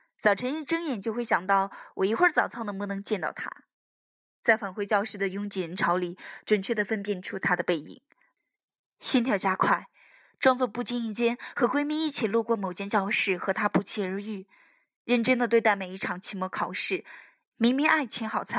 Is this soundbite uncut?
no; 1 cut; at 17.4 s

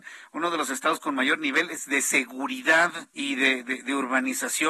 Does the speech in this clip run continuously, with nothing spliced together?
no; 1 cut; at 3.1 s

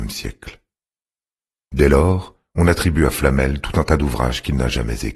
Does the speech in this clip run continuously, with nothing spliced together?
yes; 0 cuts

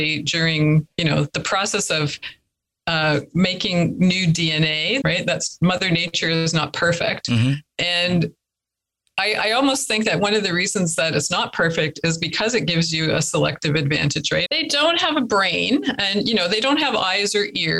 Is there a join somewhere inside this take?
yes; 2 cuts; at 5.0 s, 14.5 s

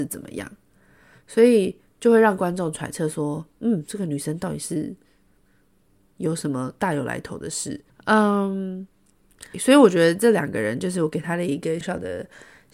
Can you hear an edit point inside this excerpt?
yes; 3 cuts; at 7.9 s, 9.5 s, 11.8 s

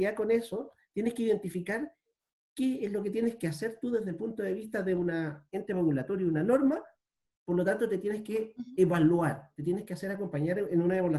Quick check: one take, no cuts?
yes; 0 cuts

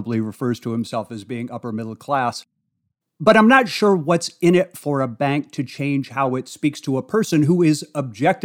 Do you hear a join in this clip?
no; 0 cuts

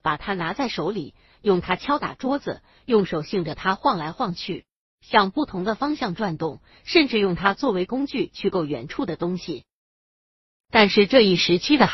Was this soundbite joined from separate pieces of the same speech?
no; 0 cuts

